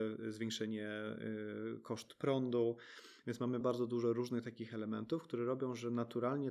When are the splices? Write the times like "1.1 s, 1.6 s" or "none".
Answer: 3.6 s